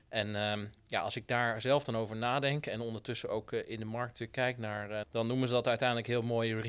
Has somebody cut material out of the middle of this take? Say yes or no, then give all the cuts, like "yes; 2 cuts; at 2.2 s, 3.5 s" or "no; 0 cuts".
yes; 1 cut; at 5.0 s